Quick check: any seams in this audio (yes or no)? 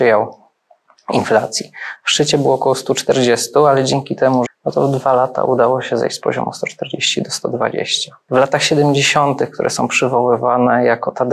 yes